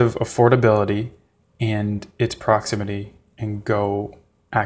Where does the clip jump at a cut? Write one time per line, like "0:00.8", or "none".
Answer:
none